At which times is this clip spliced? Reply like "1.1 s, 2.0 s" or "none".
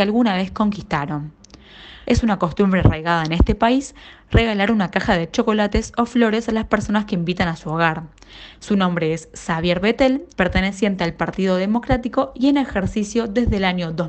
2.0 s, 8.5 s, 10.3 s